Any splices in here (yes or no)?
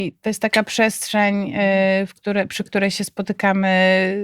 no